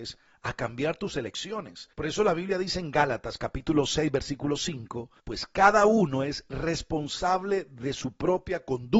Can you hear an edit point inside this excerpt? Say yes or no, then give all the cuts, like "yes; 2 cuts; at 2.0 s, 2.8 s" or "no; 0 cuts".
yes; 2 cuts; at 1.9 s, 5.2 s